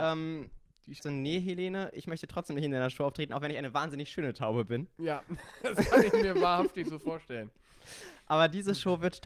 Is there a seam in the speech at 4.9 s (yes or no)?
no